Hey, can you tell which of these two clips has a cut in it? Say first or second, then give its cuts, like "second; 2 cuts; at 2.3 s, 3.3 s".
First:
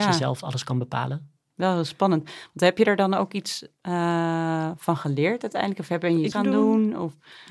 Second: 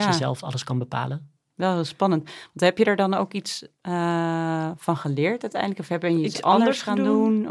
first; 1 cut; at 6.3 s